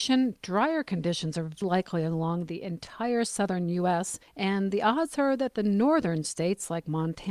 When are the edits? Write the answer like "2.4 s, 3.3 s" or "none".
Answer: 1.6 s